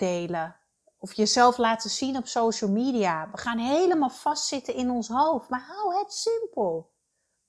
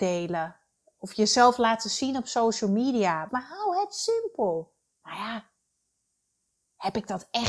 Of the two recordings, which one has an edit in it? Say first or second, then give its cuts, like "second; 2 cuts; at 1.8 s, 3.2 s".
second; 2 cuts; at 3.3 s, 4.9 s